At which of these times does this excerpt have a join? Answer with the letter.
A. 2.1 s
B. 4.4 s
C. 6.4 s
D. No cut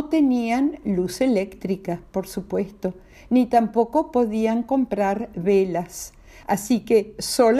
C